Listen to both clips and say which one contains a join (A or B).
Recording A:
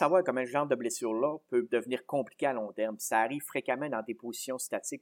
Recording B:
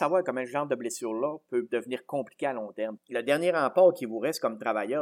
B